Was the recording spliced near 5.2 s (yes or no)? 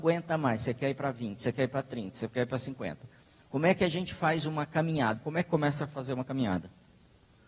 yes